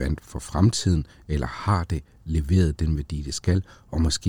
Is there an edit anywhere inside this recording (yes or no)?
no